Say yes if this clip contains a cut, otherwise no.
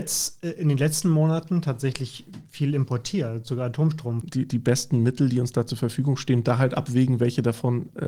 yes